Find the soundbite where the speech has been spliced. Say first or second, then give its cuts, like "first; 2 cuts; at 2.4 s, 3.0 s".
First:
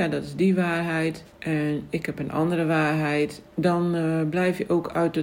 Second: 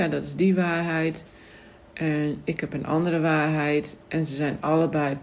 first; 2 cuts; at 1.3 s, 3.5 s